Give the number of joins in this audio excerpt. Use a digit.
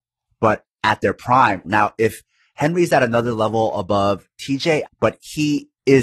2